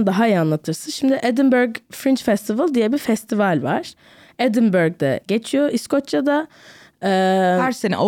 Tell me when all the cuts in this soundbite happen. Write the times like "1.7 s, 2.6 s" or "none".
none